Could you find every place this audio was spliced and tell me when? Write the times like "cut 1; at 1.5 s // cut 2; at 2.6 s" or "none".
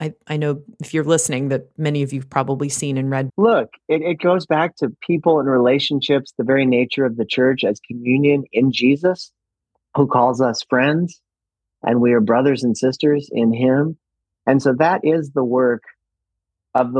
cut 1; at 3.3 s